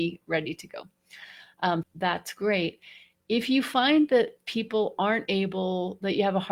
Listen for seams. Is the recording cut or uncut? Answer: cut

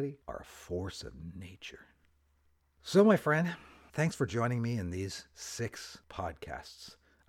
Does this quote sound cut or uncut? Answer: uncut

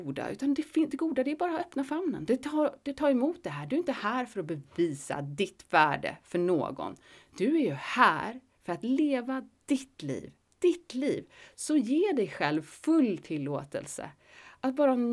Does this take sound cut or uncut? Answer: uncut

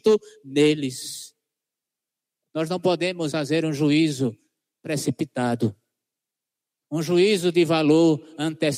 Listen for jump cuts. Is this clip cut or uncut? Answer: cut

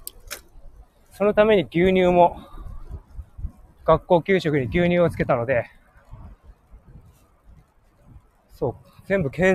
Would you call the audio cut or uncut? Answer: cut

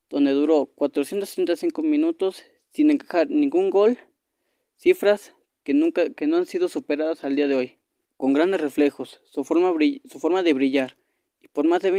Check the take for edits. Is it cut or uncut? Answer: cut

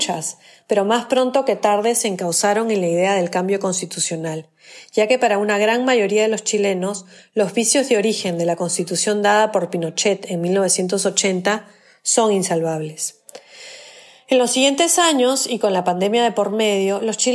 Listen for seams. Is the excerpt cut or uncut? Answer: uncut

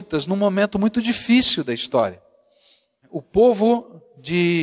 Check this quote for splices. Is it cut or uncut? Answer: uncut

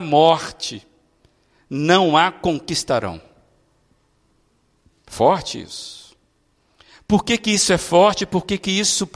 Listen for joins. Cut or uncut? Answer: uncut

